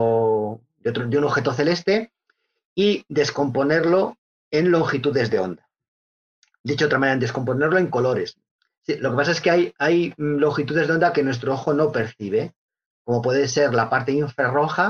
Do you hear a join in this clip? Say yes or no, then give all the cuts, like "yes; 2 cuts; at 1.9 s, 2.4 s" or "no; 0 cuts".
no; 0 cuts